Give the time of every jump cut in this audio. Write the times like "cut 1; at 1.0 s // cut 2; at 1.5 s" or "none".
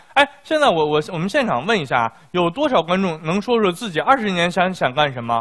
none